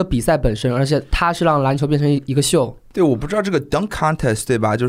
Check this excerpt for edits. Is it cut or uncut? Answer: uncut